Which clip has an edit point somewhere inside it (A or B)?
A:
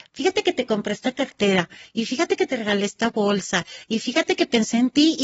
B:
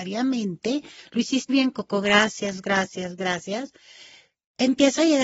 B